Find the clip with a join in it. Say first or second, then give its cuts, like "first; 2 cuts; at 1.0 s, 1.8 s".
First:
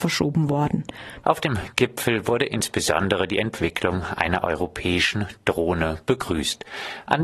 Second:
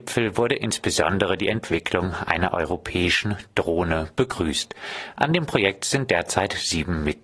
first; 1 cut; at 1.2 s